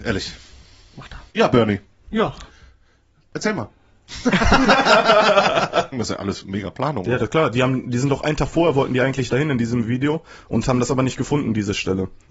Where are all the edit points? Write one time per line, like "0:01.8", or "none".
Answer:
0:01.3
0:05.9